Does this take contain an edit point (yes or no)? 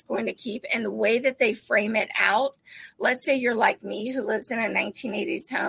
no